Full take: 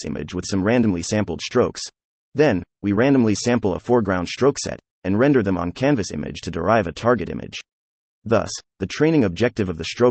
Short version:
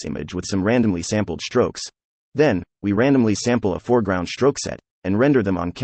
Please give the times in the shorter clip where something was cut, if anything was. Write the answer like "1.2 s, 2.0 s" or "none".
none